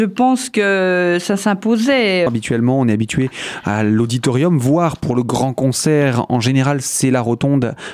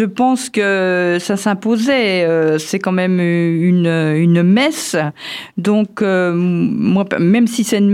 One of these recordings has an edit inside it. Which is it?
first; 1 cut; at 2.3 s

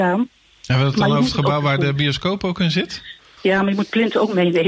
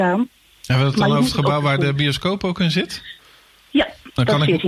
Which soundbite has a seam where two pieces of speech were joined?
first; 1 cut; at 3.4 s

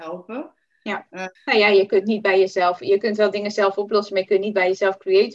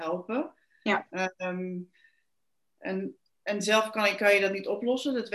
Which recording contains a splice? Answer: first; 1 cut; at 1.3 s

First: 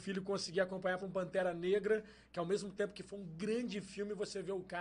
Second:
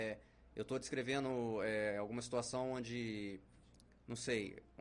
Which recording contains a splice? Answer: first; 1 cut; at 1.0 s

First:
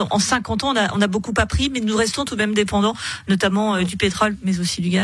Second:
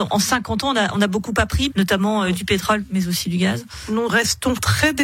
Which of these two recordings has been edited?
second; 1 cut; at 1.7 s

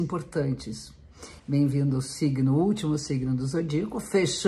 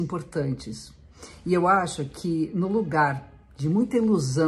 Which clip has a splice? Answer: first; 1 cut; at 1.4 s

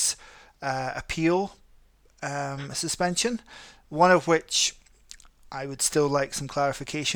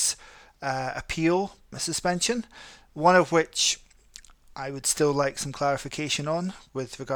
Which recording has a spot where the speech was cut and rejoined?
second; 1 cut; at 1.7 s

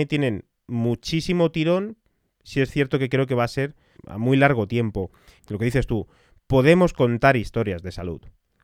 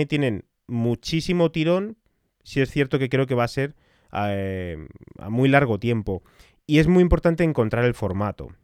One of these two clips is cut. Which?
first; 2 cuts; at 4.0 s, 5.4 s

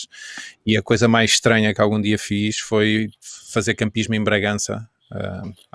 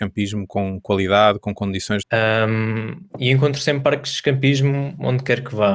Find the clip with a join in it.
second; 2 cuts; at 2.0 s, 3.1 s

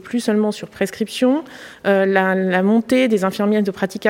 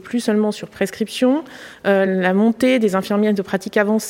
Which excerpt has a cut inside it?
second; 1 cut; at 2.1 s

